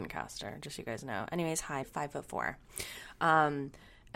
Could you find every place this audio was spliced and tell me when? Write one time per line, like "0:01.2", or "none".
0:01.8